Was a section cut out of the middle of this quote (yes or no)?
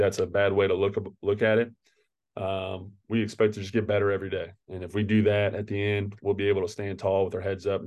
no